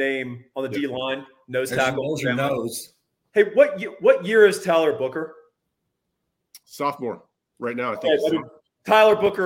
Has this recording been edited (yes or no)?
no